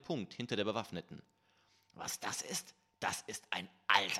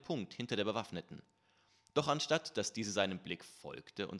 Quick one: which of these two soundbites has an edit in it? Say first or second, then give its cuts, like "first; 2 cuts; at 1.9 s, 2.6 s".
first; 1 cut; at 1.8 s